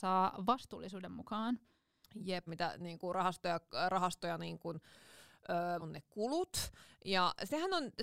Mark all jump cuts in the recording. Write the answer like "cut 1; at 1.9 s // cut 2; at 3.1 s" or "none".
cut 1; at 2.5 s // cut 2; at 5.8 s